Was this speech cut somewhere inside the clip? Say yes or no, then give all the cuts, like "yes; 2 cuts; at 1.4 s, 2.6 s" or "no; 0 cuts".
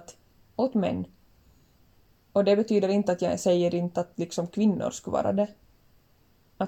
no; 0 cuts